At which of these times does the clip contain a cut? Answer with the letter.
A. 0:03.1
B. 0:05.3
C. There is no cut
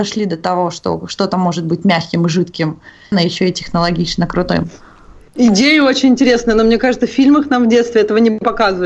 A